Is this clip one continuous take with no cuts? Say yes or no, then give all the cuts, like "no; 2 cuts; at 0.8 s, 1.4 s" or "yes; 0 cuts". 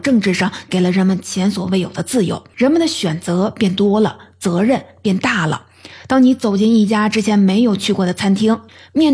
no; 1 cut; at 2.5 s